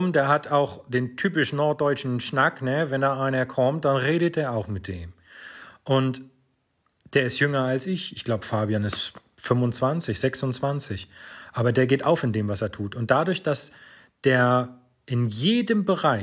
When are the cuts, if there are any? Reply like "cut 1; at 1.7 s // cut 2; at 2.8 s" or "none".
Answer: none